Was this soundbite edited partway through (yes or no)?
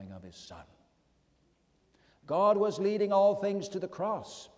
no